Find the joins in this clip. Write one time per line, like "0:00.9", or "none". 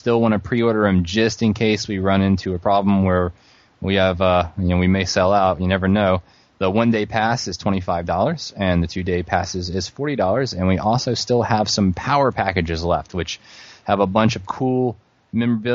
none